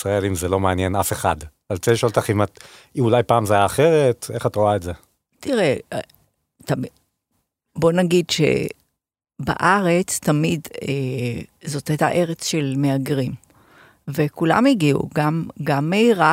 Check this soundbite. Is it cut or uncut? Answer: uncut